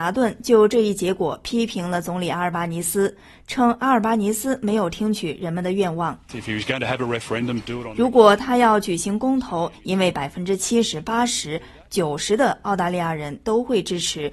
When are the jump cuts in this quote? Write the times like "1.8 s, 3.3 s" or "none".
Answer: 9.7 s